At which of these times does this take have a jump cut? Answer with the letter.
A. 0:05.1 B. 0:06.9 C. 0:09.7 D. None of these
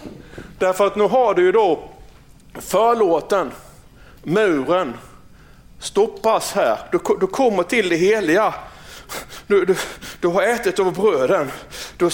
D